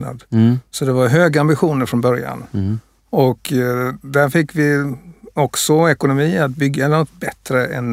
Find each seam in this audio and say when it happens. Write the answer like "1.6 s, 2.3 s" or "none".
none